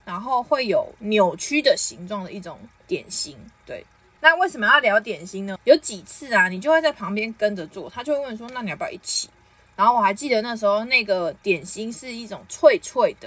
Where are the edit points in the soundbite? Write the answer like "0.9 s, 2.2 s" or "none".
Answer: 4.2 s, 5.6 s

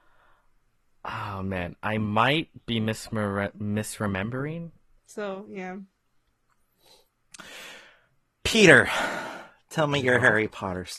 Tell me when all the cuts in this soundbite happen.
5.0 s

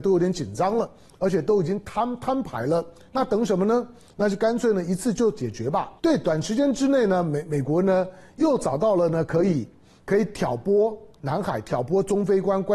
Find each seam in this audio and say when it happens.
6.0 s

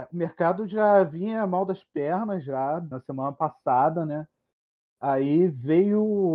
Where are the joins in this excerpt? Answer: 2.9 s

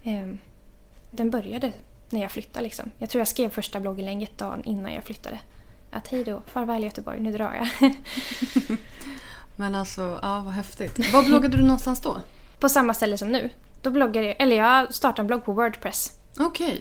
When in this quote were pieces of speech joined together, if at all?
1.1 s

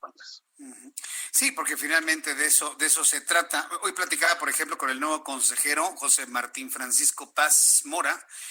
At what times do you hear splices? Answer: none

